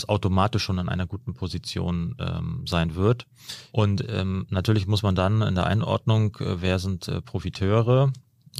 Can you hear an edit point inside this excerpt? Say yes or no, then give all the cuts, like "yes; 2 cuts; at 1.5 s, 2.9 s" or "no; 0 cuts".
yes; 1 cut; at 3.7 s